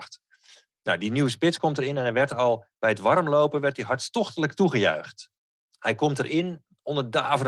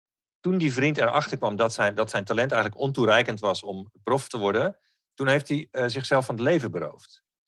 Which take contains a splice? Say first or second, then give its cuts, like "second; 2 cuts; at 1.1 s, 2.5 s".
first; 1 cut; at 5.7 s